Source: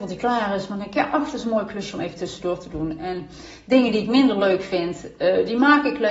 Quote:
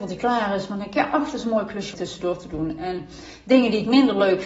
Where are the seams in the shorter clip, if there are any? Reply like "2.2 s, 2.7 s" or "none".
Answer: 1.9 s